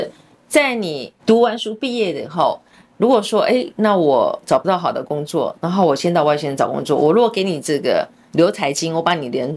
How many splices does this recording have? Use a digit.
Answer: 1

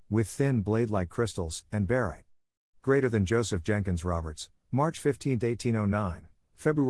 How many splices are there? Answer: 1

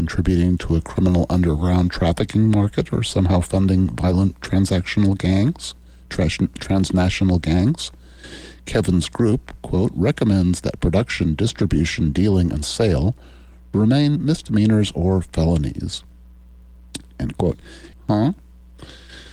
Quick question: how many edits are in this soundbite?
1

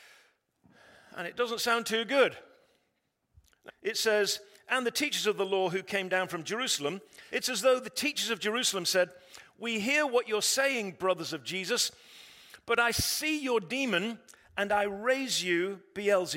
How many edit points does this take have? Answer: 2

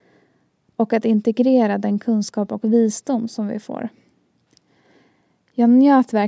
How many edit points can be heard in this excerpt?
0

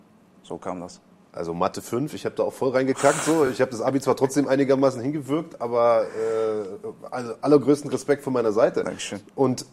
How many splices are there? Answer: 0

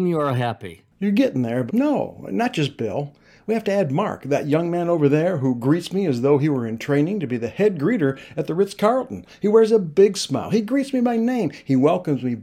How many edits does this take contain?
1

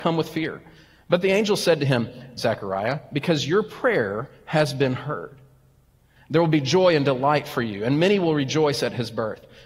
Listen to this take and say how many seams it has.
2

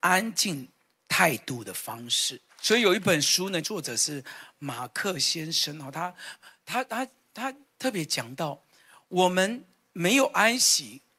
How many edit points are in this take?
2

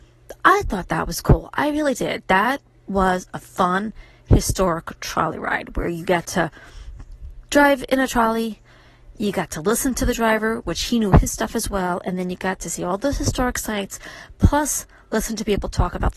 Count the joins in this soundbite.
0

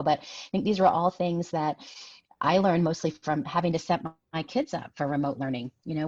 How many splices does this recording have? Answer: 0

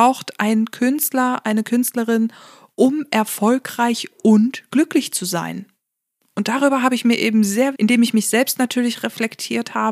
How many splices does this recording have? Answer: 1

